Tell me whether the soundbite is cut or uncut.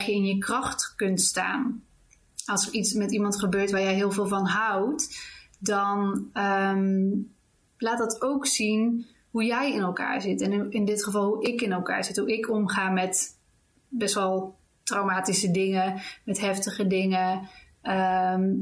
uncut